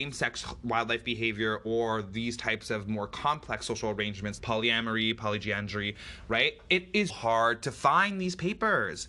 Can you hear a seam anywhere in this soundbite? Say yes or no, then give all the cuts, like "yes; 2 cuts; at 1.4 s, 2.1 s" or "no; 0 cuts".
yes; 2 cuts; at 4.4 s, 7.1 s